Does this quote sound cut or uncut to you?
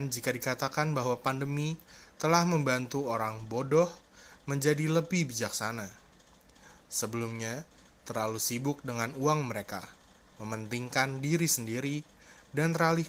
cut